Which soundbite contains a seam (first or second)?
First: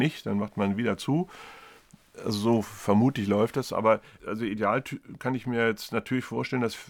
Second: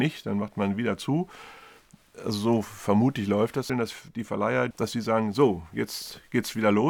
second